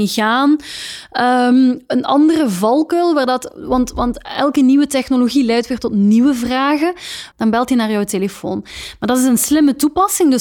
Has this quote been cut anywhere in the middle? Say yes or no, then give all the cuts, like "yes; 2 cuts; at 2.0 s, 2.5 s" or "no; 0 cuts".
yes; 1 cut; at 7.3 s